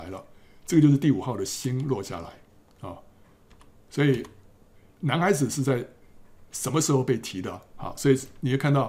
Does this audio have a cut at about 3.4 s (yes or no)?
no